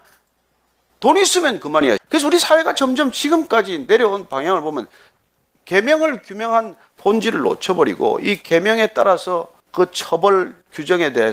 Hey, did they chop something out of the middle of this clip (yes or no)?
yes